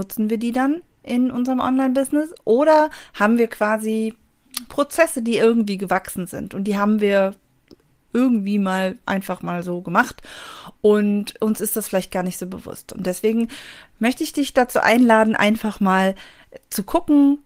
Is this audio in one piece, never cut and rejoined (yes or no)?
yes